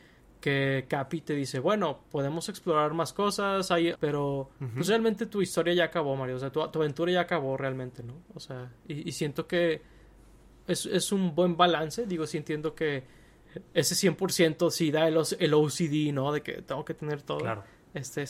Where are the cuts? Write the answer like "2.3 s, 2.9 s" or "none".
3.9 s